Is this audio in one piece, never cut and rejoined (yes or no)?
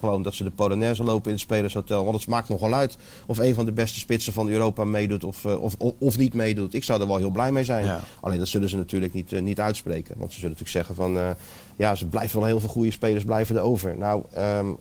yes